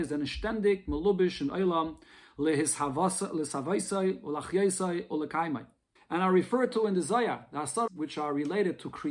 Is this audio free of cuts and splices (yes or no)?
no